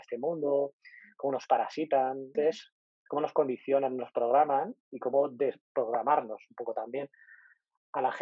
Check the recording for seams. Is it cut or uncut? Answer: cut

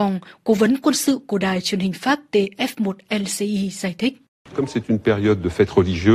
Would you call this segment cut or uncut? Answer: uncut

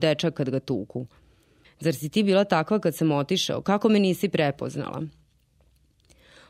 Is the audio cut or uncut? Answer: cut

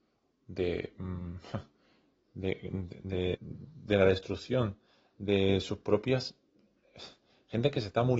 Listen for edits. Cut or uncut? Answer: cut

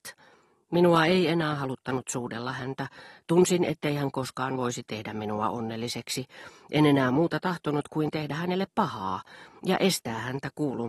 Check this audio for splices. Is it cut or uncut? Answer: uncut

